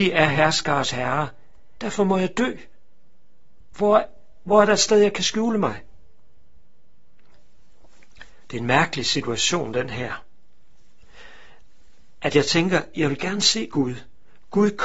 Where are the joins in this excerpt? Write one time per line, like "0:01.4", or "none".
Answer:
0:01.8